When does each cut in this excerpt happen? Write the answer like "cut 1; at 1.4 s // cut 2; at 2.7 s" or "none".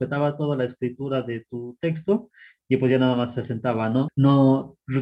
cut 1; at 4.1 s